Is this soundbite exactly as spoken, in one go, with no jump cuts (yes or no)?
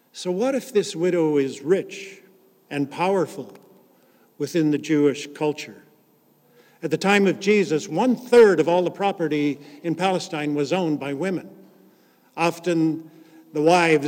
yes